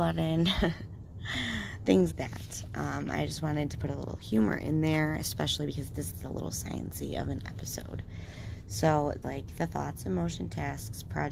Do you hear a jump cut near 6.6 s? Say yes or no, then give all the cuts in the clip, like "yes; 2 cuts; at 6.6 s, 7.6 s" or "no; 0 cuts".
no; 2 cuts; at 2.1 s, 9.2 s